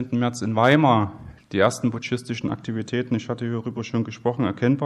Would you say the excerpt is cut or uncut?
uncut